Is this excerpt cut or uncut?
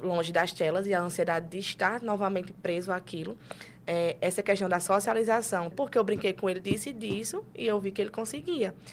cut